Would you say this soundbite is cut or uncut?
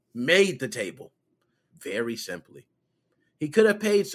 cut